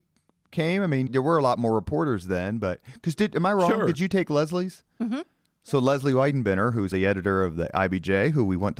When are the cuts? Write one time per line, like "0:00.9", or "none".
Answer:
0:01.1
0:06.9